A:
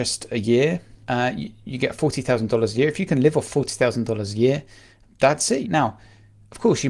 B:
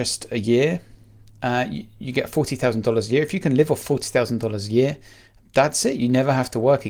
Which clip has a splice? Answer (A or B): A